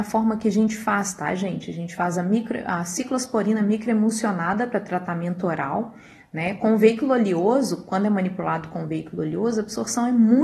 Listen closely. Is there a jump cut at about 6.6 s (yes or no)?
no